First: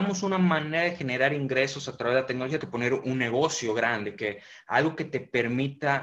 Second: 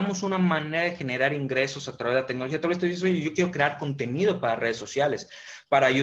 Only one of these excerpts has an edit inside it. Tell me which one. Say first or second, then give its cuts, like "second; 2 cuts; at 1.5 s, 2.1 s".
first; 1 cut; at 2.6 s